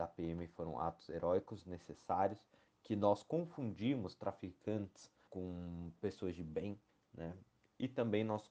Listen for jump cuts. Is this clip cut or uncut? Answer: cut